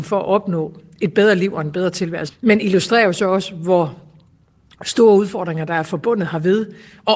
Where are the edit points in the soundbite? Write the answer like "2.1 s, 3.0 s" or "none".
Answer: 2.3 s